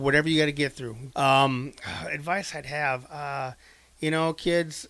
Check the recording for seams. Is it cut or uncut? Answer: cut